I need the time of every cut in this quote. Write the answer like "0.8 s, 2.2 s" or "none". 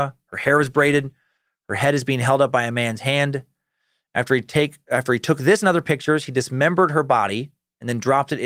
none